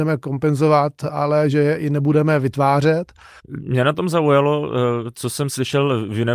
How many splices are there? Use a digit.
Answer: 1